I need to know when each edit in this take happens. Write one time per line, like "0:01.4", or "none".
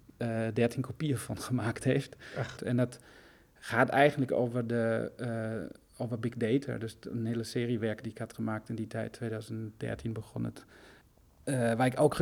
0:02.6